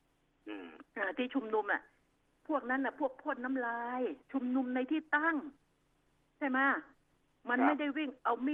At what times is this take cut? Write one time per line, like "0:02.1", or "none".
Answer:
0:04.2